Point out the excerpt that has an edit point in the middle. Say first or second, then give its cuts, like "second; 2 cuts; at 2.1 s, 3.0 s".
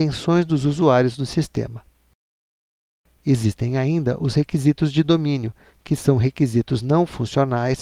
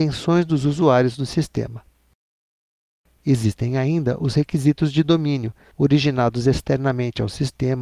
second; 1 cut; at 5.7 s